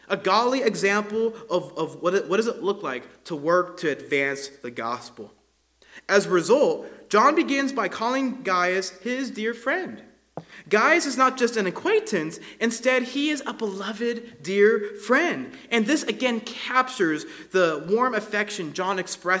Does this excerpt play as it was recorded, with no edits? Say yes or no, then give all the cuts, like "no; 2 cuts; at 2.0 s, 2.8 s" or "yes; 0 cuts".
yes; 0 cuts